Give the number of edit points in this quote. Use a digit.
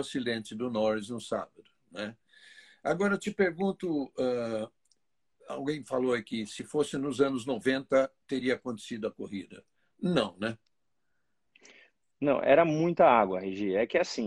0